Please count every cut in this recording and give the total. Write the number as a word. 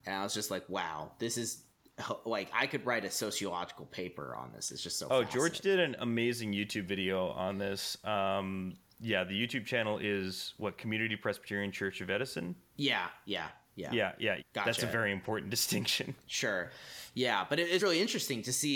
two